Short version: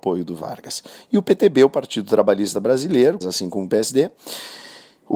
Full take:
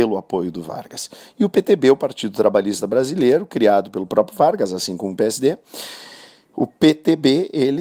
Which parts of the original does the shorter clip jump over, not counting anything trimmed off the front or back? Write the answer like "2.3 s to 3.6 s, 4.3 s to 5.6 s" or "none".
3.5 s to 4.7 s